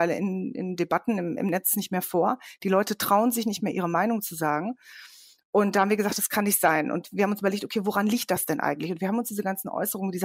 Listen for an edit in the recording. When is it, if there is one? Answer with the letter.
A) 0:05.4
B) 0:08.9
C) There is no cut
C